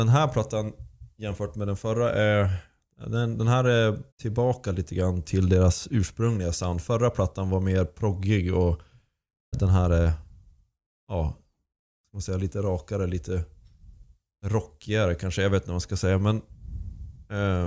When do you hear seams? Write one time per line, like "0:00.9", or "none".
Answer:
0:04.1
0:09.5